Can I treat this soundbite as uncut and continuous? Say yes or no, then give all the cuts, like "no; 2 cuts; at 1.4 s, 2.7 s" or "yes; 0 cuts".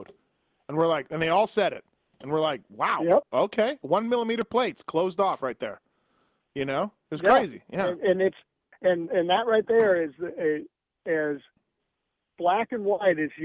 yes; 0 cuts